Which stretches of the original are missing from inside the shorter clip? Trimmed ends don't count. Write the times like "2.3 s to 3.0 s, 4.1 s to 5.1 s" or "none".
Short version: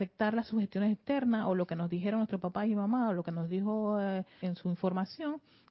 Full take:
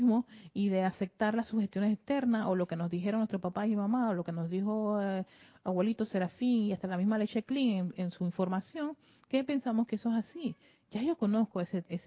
5.4 s to 8.0 s